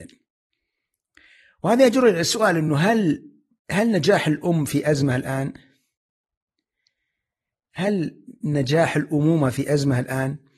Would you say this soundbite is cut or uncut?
uncut